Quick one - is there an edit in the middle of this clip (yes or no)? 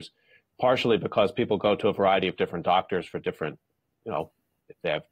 no